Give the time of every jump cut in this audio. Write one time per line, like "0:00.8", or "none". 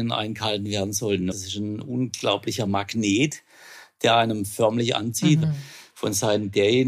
0:01.3
0:05.4